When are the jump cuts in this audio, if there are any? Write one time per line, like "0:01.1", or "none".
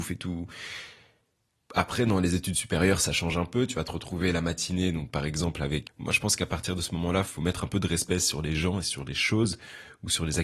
0:01.6
0:05.9